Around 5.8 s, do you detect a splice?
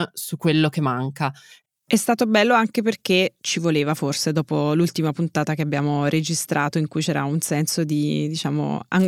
no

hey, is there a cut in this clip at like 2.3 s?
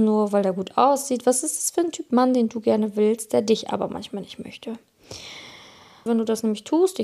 no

